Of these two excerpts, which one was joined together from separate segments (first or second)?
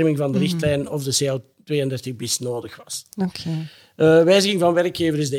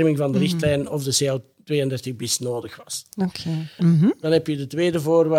second